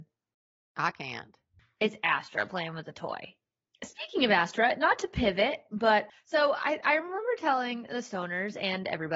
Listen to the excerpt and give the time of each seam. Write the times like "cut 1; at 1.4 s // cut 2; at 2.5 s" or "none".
none

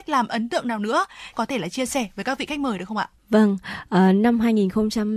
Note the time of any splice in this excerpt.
cut 1; at 1.3 s // cut 2; at 3.2 s

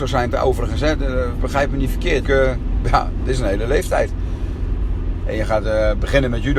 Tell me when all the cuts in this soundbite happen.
cut 1; at 2.2 s // cut 2; at 5.2 s

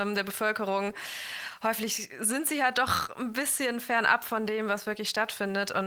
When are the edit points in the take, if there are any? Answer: none

